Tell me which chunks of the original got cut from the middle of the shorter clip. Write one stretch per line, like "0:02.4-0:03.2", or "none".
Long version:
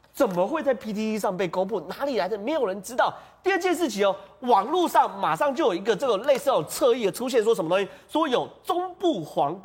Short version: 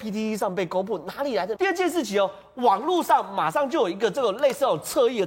0:02.4-0:03.4